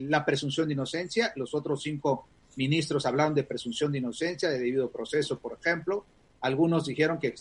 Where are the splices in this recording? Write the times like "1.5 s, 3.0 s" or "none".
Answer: none

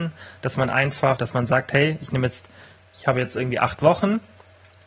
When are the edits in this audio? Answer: 1.2 s

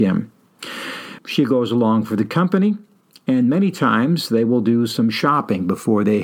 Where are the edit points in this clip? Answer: 1.2 s

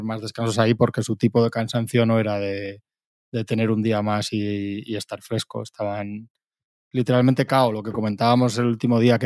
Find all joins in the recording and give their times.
none

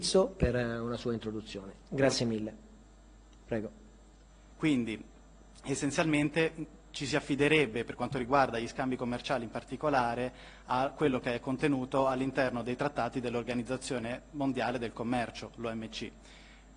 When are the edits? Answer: 4.5 s

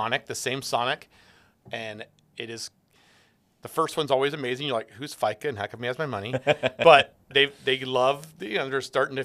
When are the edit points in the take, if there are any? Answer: 1.5 s

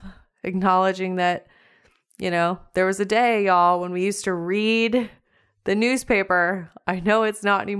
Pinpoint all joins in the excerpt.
none

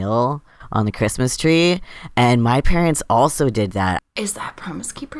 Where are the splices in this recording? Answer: 4.0 s

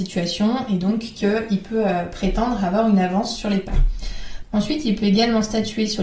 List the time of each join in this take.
4.4 s

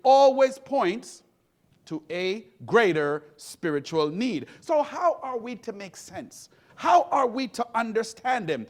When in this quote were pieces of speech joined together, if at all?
6.7 s

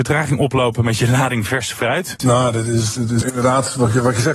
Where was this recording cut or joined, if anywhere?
2.2 s, 3.2 s

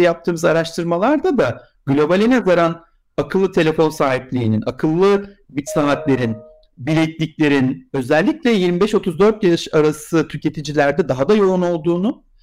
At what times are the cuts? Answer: none

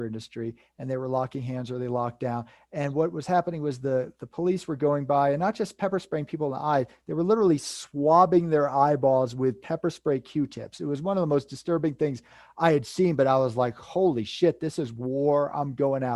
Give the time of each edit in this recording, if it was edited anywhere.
none

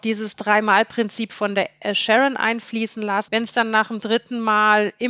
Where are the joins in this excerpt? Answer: 3.3 s

